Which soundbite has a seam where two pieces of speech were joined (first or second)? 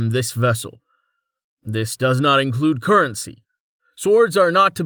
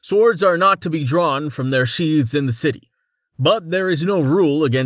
first